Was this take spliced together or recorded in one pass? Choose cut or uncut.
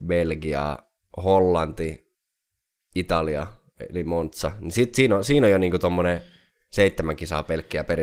uncut